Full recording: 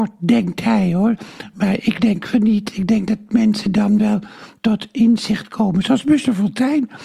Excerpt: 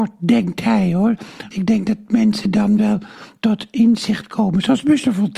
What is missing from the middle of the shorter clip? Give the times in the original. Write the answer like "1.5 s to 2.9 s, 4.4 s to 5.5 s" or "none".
1.5 s to 2.7 s